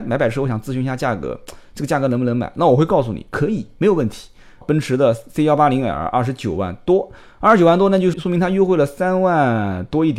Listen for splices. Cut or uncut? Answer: cut